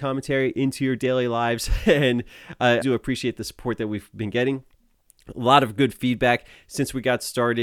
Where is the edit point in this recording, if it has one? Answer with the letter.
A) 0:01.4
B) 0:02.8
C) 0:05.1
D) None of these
B